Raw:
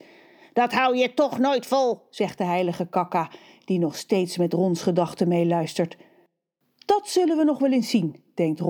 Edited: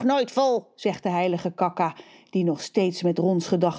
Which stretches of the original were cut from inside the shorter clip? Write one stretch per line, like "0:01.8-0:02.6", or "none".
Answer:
none